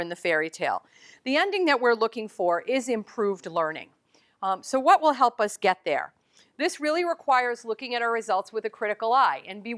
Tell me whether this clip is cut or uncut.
uncut